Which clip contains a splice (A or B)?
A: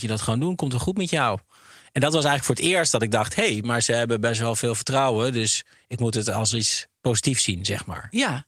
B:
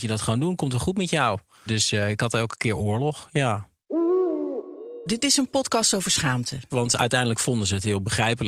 B